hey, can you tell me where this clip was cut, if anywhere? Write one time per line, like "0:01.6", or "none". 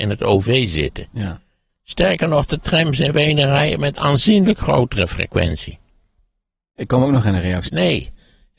0:01.7
0:07.7